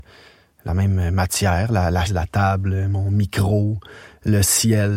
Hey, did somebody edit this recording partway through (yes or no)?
yes